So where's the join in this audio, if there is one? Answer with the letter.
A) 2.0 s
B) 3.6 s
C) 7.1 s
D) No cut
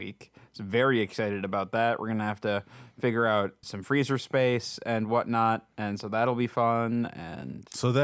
B